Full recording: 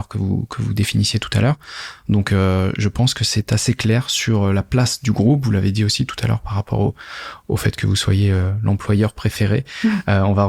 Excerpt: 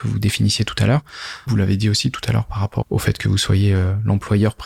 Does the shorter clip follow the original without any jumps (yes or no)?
no